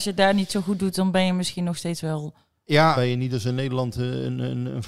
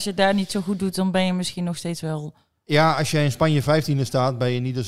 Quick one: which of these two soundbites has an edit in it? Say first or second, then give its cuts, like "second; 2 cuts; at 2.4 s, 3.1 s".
first; 1 cut; at 2.9 s